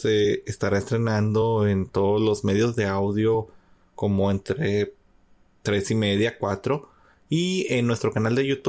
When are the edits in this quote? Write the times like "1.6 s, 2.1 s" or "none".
none